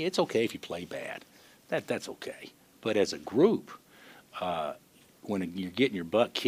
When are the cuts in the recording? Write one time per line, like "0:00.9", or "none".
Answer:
none